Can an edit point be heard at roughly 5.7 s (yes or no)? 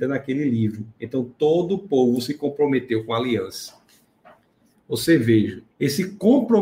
yes